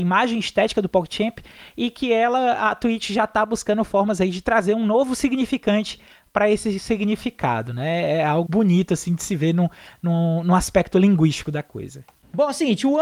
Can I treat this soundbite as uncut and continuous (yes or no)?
no